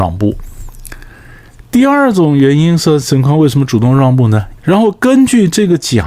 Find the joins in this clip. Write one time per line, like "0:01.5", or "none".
0:04.6